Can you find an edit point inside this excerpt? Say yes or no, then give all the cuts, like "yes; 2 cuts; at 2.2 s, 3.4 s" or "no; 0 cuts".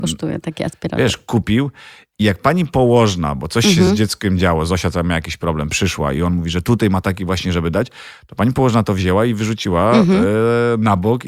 no; 0 cuts